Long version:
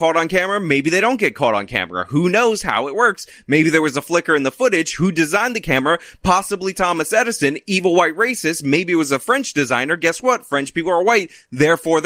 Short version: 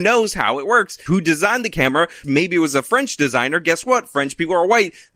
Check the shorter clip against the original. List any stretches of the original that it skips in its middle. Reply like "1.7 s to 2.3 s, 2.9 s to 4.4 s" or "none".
3.3 s to 5.0 s, 6.1 s to 8.6 s